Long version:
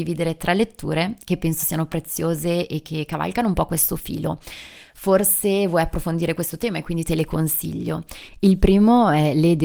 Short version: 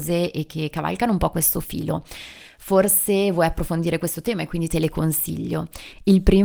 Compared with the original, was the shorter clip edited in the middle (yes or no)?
no